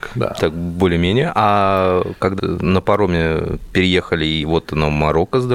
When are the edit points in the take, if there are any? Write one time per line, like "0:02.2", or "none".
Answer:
0:02.4